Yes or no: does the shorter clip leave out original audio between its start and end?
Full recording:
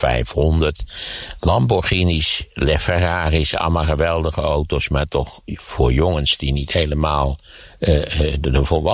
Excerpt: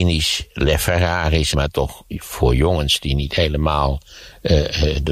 yes